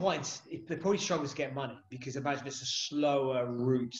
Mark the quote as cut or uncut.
uncut